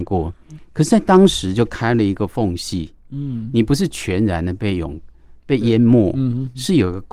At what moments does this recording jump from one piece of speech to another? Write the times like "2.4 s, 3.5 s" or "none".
5.4 s